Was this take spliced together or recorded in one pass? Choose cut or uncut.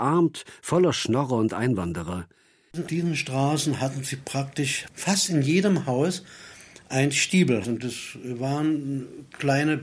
cut